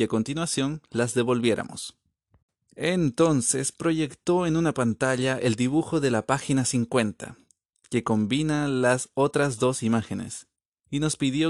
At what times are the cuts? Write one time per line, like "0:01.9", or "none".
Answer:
none